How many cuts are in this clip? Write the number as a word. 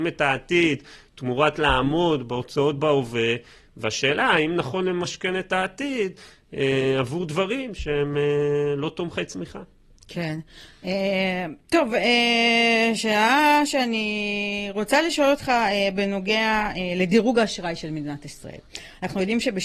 zero